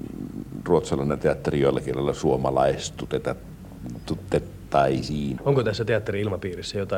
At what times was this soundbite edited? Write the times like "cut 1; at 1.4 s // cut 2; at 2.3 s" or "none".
cut 1; at 5.4 s